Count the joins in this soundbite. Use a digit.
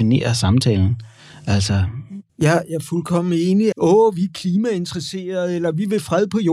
2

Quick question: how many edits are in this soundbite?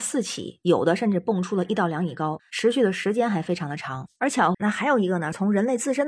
1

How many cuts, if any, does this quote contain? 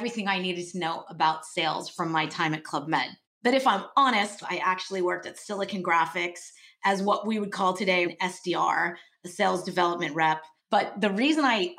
3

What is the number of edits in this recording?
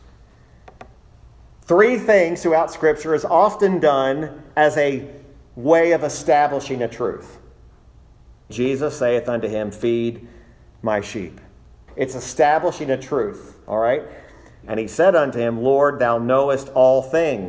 3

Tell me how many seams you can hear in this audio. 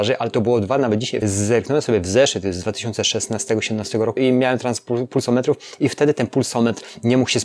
2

